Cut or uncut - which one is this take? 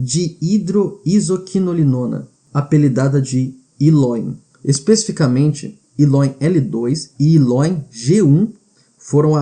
cut